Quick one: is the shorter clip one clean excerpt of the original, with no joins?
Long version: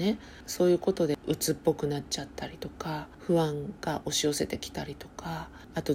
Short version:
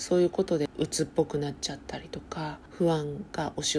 yes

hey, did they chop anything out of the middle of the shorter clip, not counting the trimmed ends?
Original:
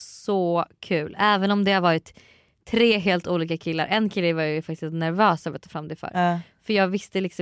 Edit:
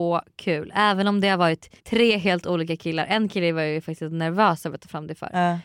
yes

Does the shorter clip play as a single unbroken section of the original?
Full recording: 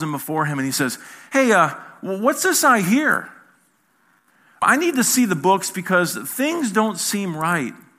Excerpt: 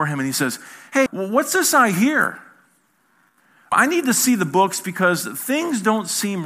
no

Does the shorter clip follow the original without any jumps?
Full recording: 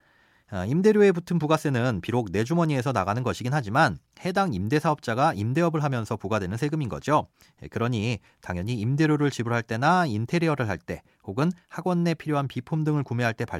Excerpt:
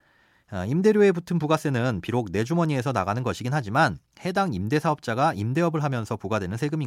yes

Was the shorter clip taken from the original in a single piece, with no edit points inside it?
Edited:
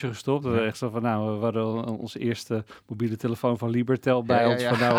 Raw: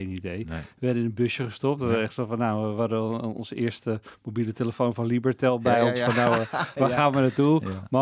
yes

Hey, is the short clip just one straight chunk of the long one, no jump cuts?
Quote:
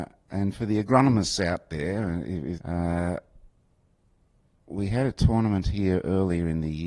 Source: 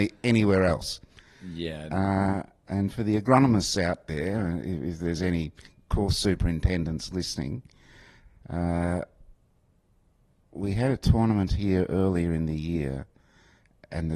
no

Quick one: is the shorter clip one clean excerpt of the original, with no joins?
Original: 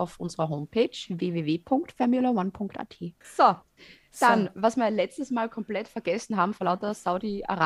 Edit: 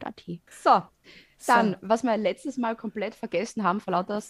yes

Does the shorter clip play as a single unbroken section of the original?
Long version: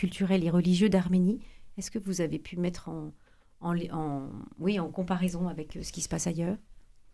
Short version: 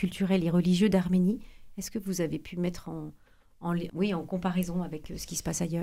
no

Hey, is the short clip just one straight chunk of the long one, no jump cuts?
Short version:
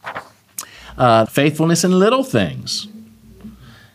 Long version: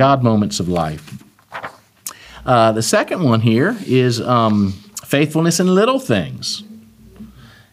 no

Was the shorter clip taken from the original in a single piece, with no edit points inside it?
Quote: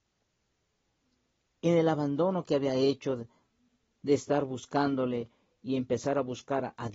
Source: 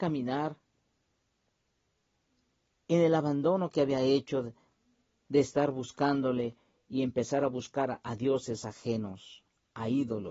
yes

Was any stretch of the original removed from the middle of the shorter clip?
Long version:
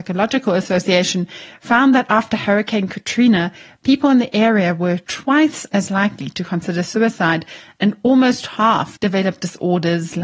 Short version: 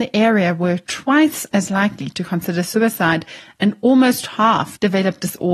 no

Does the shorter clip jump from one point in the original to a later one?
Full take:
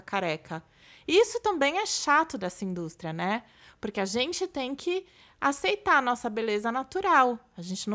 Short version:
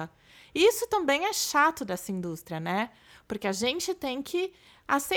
no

